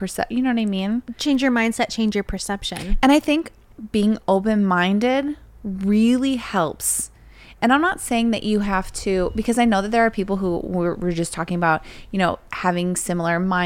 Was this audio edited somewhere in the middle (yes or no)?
no